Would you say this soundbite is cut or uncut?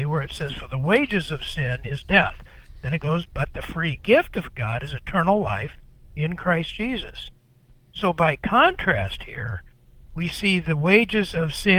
uncut